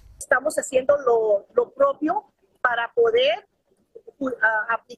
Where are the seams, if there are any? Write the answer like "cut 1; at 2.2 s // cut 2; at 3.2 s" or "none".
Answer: cut 1; at 1.5 s

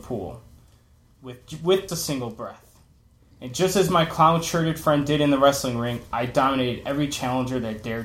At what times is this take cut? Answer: cut 1; at 1.9 s

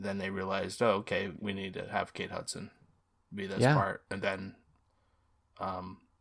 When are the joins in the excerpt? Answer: cut 1; at 1.4 s

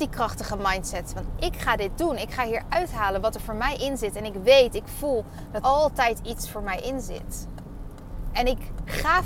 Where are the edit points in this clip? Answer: cut 1; at 5.6 s

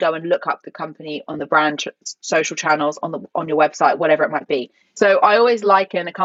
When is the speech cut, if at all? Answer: cut 1; at 4.8 s

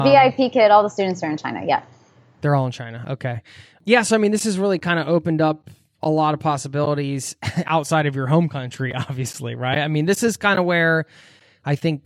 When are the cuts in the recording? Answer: none

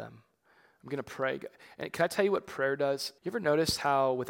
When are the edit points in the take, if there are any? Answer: cut 1; at 3.2 s

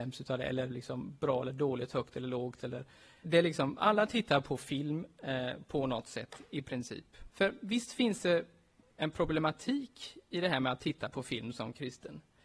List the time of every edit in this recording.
cut 1; at 3.2 s // cut 2; at 7.3 s

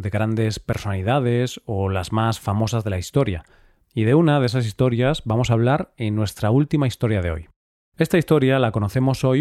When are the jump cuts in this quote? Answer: cut 1; at 3.8 s

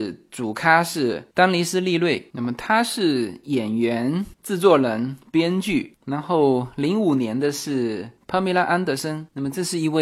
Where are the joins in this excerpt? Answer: cut 1; at 6.0 s

